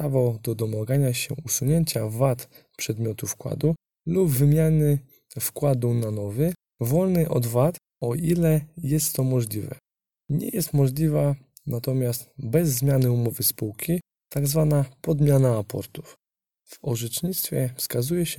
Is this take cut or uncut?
uncut